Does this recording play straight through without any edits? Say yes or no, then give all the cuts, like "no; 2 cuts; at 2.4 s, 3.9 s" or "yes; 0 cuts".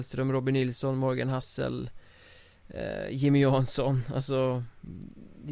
yes; 0 cuts